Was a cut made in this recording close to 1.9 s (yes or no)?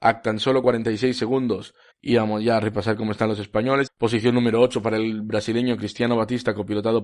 yes